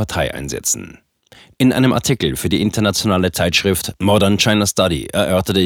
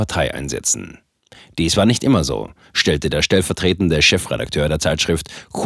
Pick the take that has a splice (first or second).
first